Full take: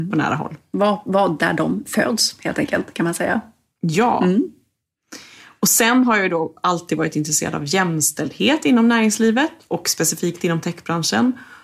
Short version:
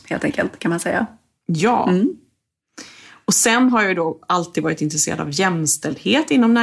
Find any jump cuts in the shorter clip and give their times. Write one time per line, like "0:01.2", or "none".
none